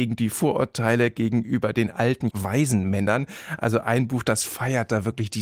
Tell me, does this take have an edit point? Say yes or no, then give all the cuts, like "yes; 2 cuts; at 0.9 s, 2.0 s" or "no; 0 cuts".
yes; 1 cut; at 2.3 s